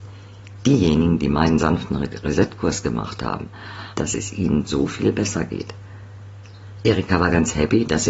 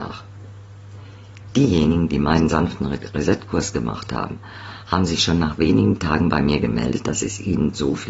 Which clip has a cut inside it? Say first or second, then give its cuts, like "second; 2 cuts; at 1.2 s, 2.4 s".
first; 1 cut; at 4.0 s